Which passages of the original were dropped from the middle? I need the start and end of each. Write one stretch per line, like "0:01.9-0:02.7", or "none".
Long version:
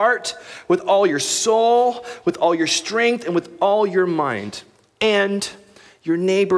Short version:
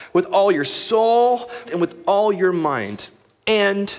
0:02.2-0:03.2